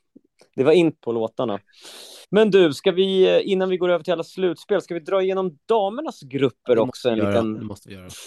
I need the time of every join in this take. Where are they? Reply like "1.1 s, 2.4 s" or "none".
1.0 s, 2.2 s

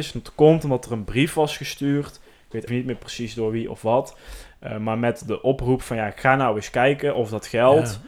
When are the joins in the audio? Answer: 2.7 s

